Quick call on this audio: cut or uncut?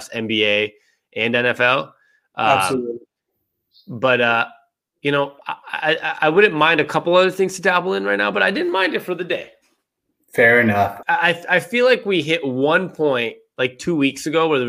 cut